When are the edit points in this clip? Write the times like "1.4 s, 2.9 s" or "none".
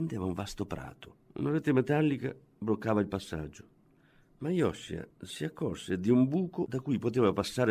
1.2 s